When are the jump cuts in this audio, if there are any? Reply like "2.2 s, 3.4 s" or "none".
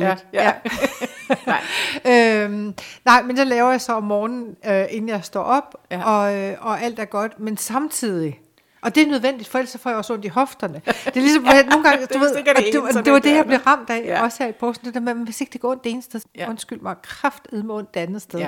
16.2 s